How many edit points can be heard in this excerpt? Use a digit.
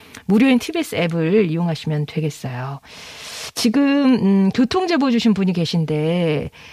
0